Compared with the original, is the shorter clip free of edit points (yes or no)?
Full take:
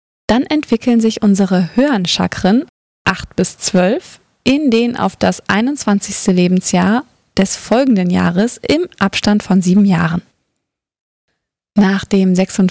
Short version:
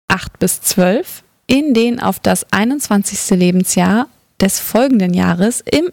yes